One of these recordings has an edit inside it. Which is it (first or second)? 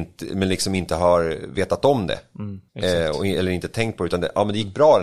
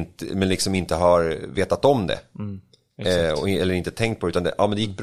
first